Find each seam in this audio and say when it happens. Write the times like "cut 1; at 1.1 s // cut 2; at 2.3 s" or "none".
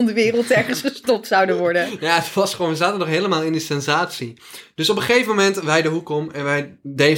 none